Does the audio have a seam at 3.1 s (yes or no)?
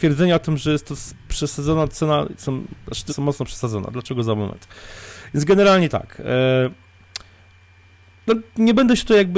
yes